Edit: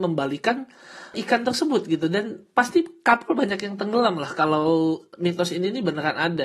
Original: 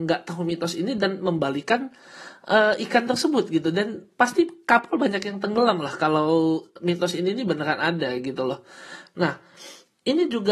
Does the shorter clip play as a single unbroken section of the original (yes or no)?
no